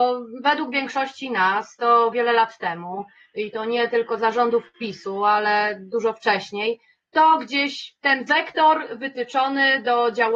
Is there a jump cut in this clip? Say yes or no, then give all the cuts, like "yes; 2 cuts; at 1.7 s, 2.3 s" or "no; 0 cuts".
yes; 1 cut; at 2.1 s